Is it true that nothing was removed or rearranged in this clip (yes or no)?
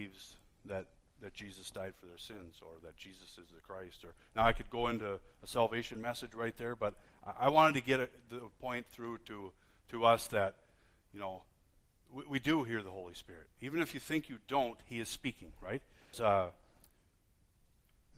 no